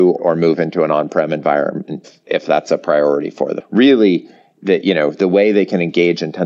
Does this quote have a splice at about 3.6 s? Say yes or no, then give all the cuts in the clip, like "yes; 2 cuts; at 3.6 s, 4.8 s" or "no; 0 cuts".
yes; 1 cut; at 3.6 s